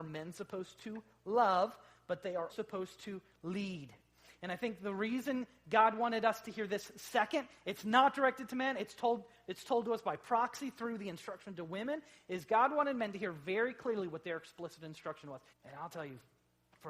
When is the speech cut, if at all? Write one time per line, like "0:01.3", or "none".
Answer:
0:02.5
0:15.5